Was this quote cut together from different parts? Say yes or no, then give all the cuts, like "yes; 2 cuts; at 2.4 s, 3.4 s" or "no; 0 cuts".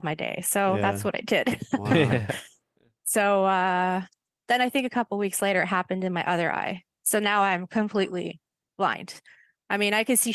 no; 0 cuts